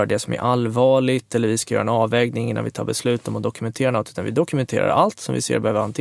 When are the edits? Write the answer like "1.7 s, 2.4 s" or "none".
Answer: none